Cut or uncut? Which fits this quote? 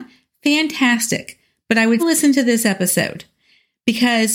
cut